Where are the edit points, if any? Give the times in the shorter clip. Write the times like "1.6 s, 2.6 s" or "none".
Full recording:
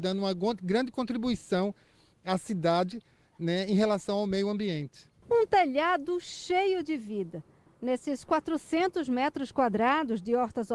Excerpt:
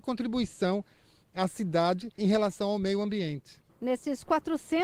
2.2 s, 3.7 s